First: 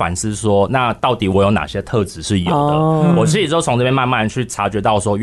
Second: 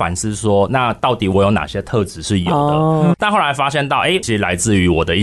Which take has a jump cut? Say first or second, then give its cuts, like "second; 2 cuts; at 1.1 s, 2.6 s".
second; 2 cuts; at 3.1 s, 4.2 s